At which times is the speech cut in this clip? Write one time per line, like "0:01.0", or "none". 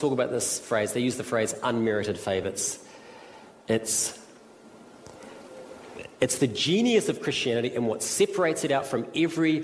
0:02.4